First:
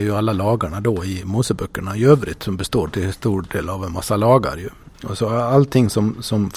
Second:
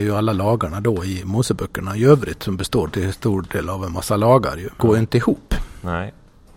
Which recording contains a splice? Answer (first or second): second